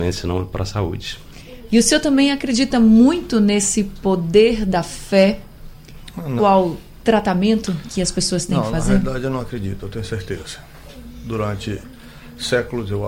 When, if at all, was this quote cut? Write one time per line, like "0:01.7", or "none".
0:01.7
0:06.4